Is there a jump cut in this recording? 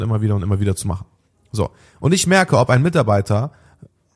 no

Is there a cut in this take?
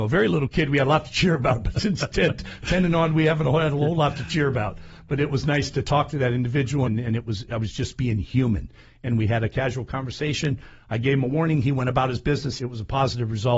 yes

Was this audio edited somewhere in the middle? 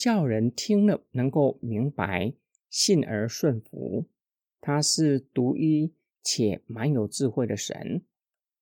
yes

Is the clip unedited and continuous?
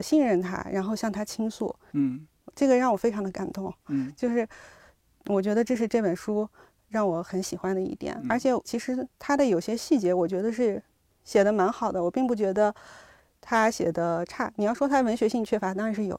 no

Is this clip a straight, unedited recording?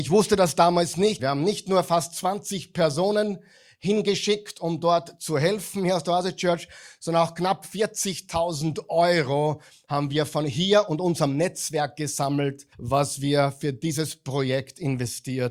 no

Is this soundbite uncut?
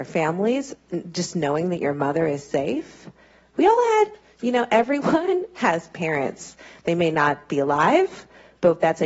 yes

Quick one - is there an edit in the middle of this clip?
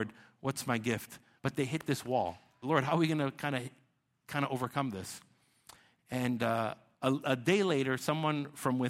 yes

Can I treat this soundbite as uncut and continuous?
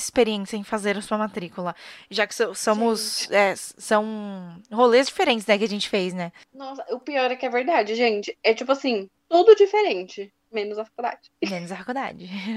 yes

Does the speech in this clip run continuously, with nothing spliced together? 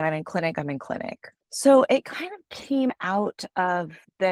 no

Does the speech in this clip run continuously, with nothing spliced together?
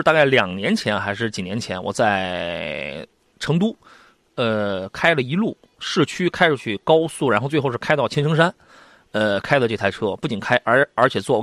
yes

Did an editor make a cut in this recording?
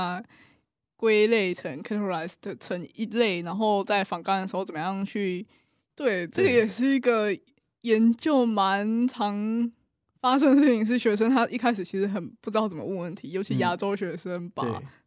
yes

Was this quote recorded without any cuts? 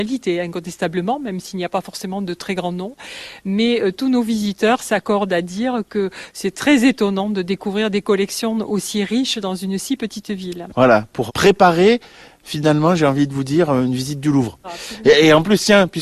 no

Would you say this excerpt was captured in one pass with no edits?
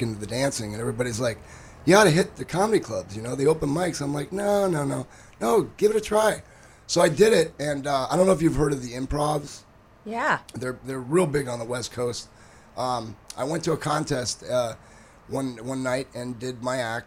yes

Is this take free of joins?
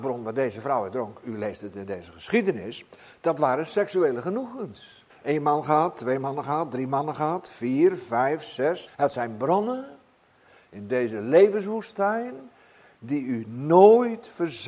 no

